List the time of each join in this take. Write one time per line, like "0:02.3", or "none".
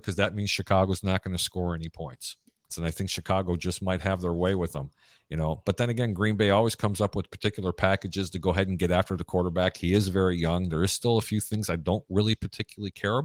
0:02.7